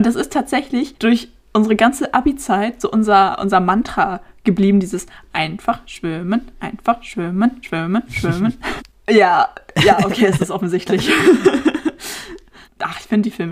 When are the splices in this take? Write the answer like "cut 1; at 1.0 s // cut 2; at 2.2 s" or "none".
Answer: cut 1; at 8.8 s

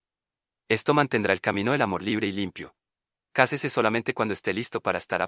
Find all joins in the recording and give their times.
cut 1; at 3.2 s

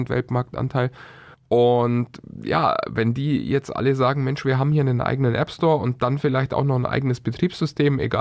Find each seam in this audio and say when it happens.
cut 1; at 1.3 s

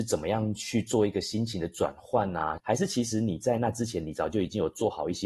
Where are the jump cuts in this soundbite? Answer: cut 1; at 2.6 s

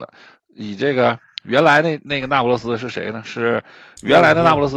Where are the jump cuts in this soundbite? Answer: none

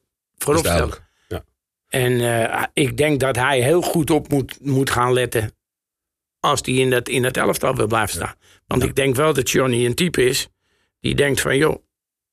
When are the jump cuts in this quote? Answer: none

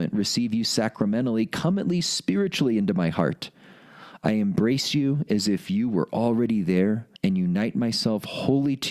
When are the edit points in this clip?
cut 1; at 7.2 s

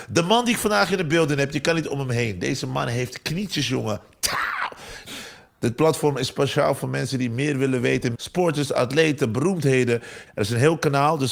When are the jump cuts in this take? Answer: cut 1; at 5.1 s // cut 2; at 8.1 s // cut 3; at 10.3 s

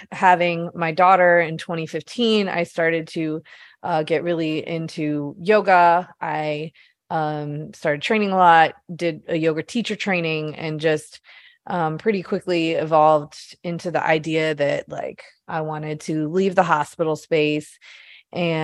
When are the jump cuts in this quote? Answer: none

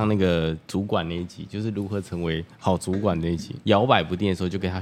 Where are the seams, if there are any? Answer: cut 1; at 3.6 s

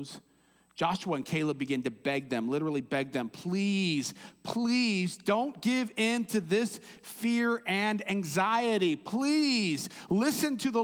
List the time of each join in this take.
none

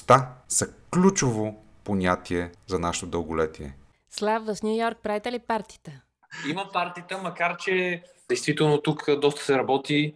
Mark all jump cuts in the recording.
none

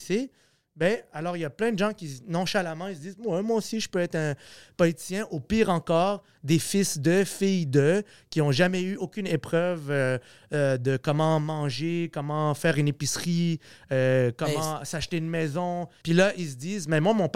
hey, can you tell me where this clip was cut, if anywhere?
cut 1; at 16.0 s

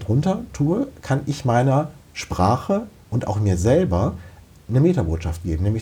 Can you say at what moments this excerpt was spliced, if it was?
cut 1; at 2.0 s

